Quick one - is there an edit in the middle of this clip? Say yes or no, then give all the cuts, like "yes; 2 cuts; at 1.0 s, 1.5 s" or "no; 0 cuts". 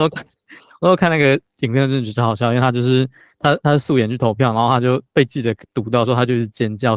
no; 0 cuts